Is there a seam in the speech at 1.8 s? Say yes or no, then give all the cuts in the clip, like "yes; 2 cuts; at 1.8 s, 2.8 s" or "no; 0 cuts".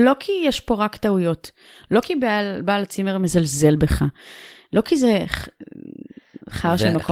no; 0 cuts